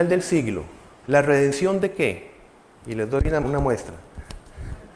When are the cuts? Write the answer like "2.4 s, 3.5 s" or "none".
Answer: 3.4 s